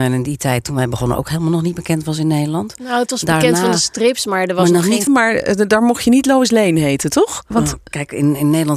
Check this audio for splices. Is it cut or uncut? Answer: cut